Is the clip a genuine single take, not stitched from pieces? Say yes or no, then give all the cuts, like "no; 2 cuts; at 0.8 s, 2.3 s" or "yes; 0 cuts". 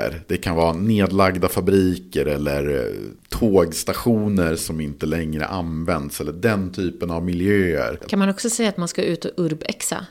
yes; 0 cuts